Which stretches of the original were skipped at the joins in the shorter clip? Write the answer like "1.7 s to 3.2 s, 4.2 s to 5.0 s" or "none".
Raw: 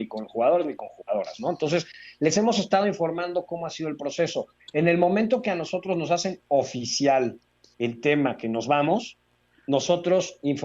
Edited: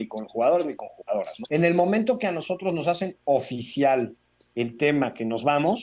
1.4 s to 4.7 s